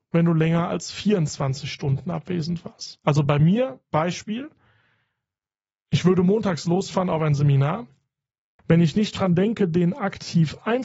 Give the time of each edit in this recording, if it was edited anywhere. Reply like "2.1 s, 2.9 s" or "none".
8.6 s